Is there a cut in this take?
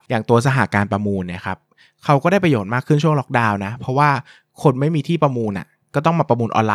no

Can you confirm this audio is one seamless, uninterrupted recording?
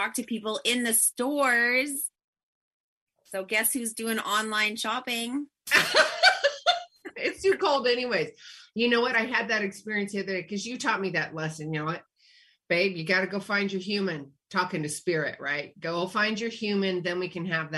yes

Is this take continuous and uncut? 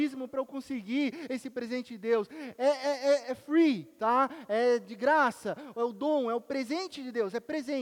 yes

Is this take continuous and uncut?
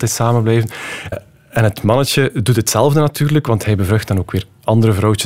no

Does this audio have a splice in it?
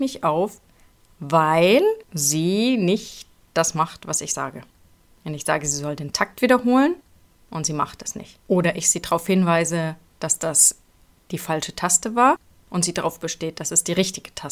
yes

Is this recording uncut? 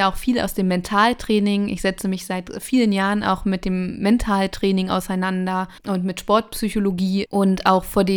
no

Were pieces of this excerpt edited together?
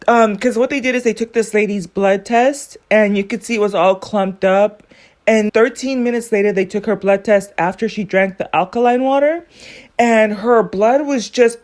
yes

